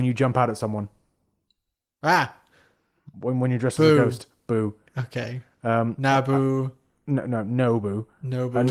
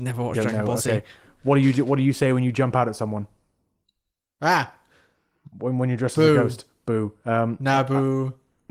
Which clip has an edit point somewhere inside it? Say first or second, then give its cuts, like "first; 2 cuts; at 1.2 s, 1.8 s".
second; 1 cut; at 7.2 s